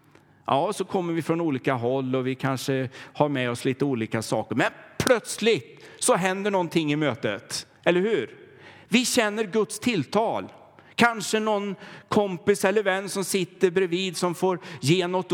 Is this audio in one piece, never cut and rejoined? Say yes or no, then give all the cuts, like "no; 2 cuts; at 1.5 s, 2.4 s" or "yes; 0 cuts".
yes; 0 cuts